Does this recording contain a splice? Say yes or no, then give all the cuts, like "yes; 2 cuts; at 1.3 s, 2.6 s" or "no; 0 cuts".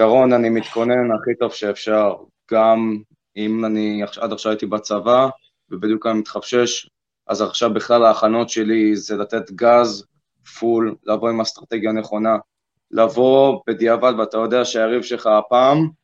no; 0 cuts